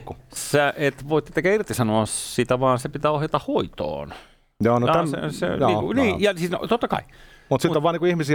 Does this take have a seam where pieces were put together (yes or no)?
no